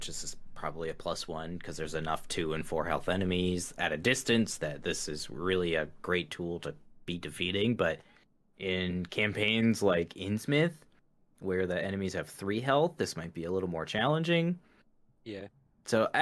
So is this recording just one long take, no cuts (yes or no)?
yes